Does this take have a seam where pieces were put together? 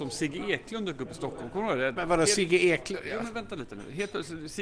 yes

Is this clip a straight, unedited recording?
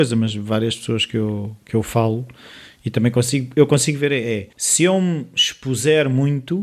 no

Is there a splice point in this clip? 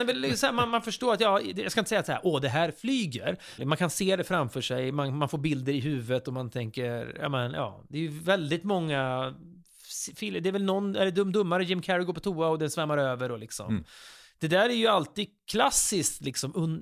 yes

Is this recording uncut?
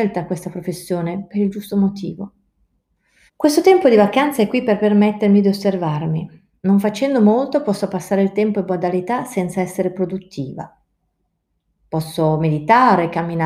no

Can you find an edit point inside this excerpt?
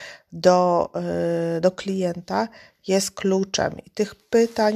no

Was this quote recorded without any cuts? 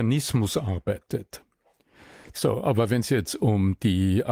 no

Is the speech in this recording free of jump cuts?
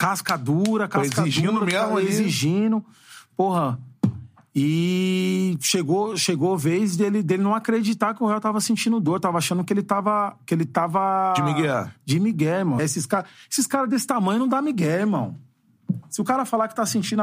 no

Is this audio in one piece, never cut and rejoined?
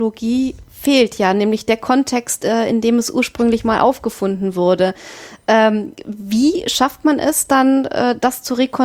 yes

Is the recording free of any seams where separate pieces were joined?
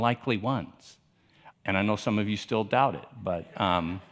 no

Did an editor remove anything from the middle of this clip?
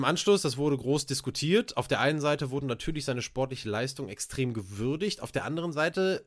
no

